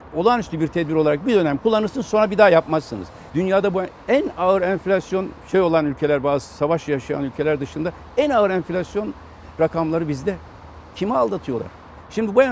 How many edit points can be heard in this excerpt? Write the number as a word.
one